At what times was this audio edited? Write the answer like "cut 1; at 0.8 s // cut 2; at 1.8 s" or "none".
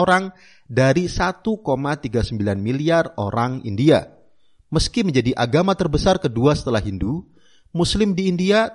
none